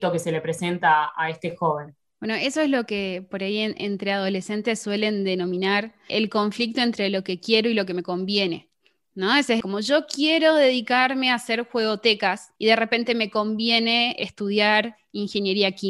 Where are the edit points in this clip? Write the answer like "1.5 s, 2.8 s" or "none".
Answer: 6.1 s, 9.6 s, 12.6 s